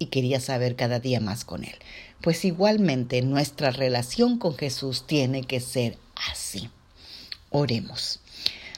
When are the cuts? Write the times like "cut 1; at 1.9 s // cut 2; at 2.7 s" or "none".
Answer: none